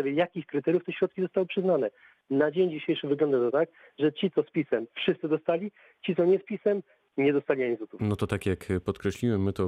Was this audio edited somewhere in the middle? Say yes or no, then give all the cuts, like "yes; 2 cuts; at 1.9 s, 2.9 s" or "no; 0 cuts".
no; 0 cuts